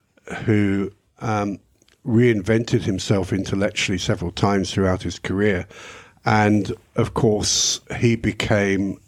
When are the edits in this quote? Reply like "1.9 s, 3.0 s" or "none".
7.9 s